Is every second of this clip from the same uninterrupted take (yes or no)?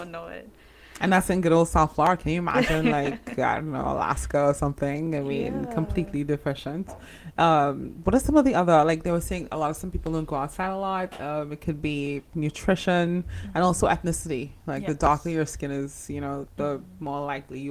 yes